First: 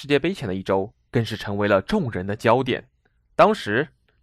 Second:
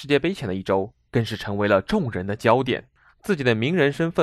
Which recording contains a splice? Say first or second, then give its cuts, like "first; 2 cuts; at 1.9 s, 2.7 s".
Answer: second; 1 cut; at 3.0 s